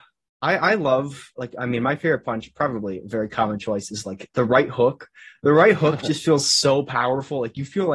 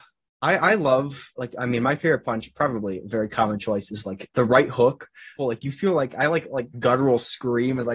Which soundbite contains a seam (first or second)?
second